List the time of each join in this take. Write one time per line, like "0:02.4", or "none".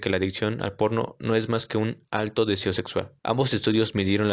0:03.2